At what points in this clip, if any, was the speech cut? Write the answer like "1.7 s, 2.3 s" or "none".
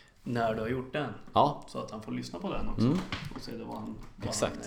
none

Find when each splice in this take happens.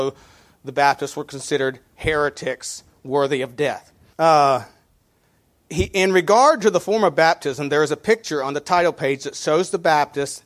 4.1 s

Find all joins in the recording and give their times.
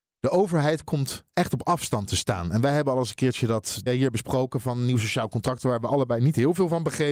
3.9 s

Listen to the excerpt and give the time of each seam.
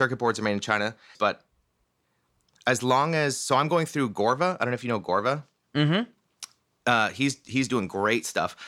1.1 s

